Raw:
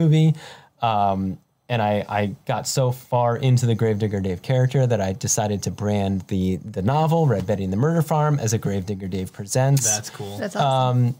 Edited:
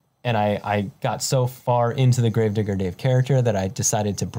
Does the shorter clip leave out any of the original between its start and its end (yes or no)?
no